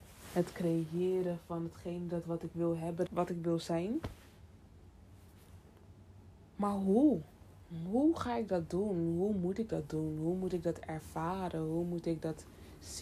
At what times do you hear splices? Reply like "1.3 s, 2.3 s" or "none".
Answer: 3.1 s